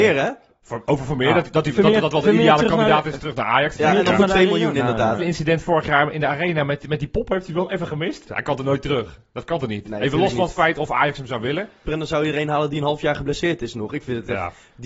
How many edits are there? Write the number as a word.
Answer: three